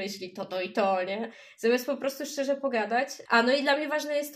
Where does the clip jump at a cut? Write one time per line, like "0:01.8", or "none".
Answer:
0:03.3

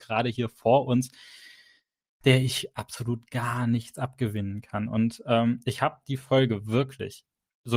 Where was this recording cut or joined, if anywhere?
0:02.2

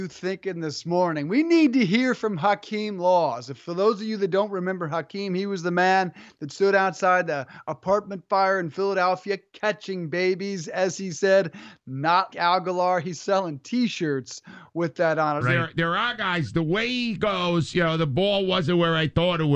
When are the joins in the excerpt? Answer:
0:12.3
0:15.4

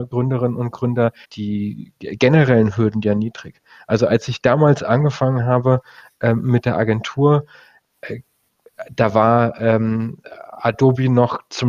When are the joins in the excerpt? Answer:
0:01.2

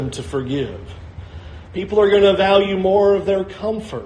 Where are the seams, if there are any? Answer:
0:01.7

